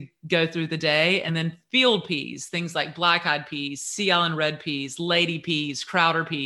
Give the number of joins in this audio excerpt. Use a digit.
0